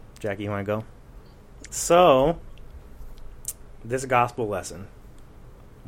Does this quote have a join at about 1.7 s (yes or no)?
yes